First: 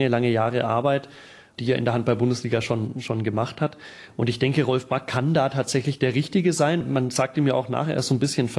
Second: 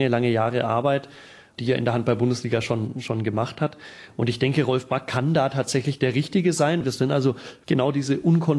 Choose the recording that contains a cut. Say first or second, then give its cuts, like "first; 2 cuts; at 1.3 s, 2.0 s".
second; 1 cut; at 6.8 s